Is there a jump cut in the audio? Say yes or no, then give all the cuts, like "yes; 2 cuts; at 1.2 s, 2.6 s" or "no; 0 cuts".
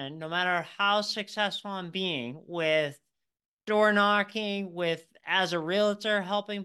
no; 0 cuts